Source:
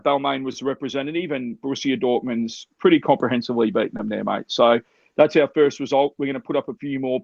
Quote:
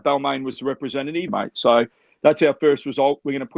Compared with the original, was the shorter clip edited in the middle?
yes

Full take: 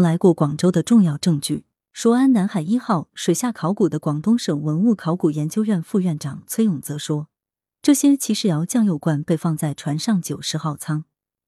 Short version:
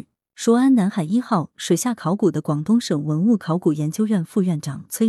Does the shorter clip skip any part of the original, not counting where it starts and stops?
no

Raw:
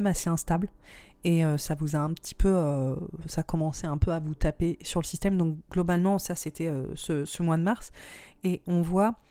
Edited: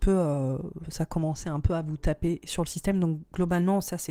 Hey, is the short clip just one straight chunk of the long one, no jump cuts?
yes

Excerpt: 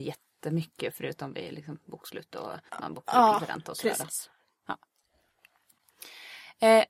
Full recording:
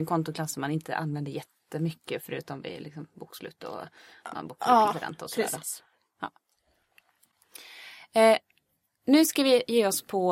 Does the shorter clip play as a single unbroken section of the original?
no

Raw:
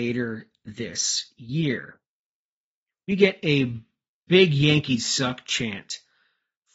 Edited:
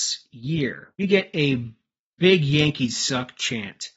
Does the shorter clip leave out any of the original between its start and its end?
yes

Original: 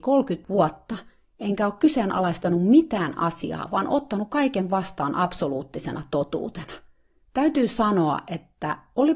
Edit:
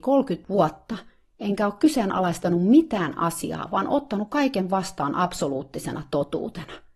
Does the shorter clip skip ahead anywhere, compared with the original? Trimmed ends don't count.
no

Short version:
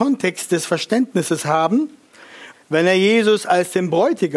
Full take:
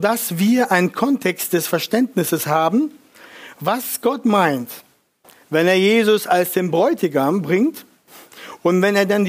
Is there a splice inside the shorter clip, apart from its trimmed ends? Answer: yes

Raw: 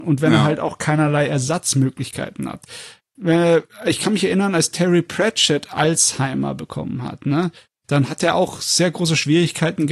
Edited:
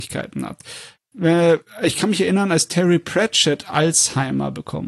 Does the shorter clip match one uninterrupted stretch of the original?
yes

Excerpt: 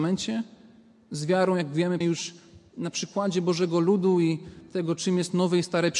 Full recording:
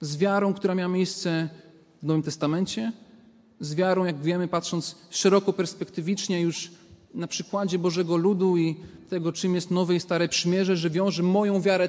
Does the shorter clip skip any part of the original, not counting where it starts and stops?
yes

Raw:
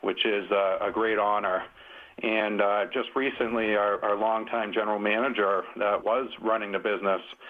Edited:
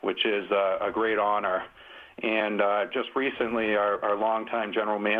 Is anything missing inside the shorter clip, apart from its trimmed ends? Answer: no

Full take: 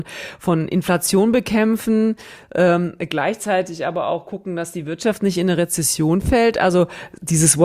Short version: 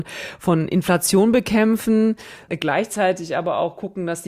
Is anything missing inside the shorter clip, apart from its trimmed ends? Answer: yes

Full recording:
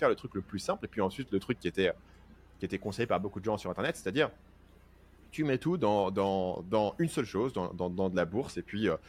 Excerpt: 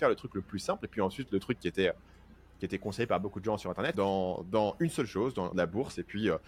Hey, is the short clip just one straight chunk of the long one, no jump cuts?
no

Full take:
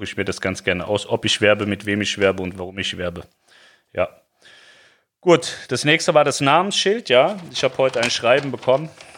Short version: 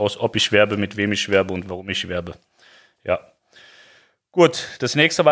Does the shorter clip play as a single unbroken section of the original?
yes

